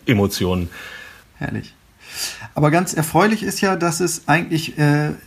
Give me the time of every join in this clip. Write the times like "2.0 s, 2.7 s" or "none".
1.2 s